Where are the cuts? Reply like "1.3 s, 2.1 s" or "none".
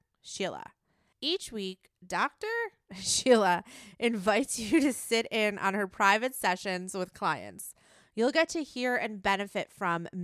1.1 s

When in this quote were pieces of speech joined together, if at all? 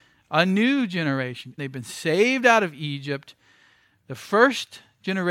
1.6 s

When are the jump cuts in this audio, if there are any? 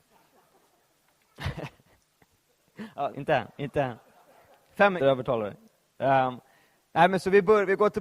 3.1 s, 5.0 s

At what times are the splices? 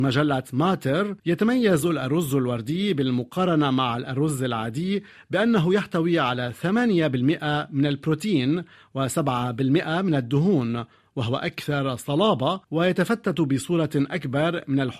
1.2 s, 12.6 s

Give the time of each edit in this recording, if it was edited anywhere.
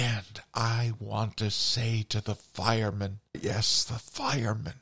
3.3 s

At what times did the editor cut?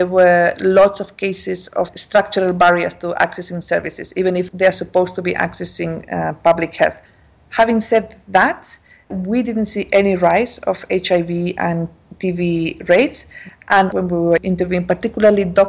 9.1 s

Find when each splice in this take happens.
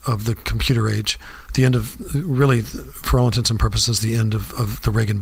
1.5 s

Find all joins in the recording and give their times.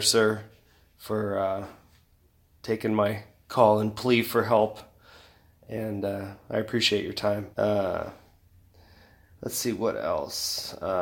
7.5 s

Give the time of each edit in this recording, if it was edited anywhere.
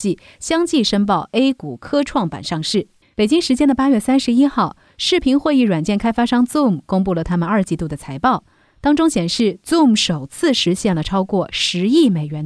3.0 s

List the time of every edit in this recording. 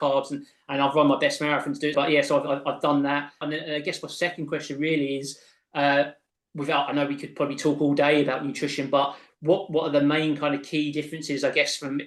1.9 s, 3.4 s

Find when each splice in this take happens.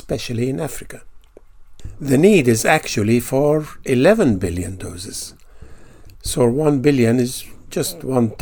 none

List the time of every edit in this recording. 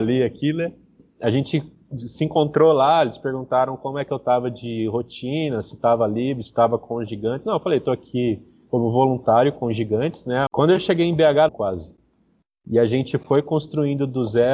10.5 s, 11.5 s

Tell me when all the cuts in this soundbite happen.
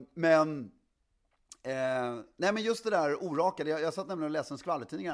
none

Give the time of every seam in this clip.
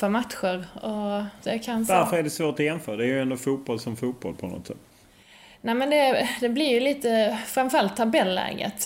1.4 s

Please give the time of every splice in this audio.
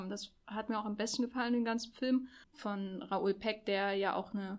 2.4 s

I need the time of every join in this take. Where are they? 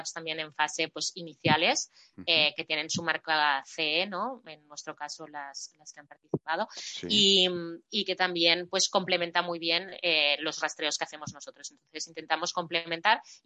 none

